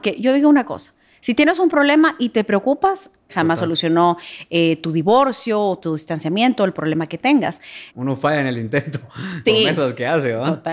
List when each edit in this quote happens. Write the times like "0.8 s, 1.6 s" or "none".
3.3 s, 7.9 s, 9.4 s